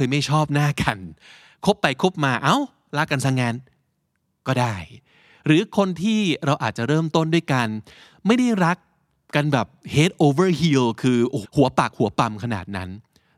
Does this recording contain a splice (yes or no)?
yes